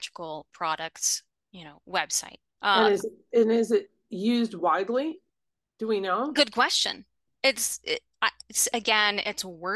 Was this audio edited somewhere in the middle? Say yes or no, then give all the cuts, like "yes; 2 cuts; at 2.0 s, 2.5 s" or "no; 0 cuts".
yes; 2 cuts; at 2.6 s, 7.3 s